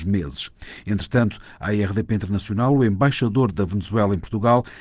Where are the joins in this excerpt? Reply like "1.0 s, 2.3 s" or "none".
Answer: none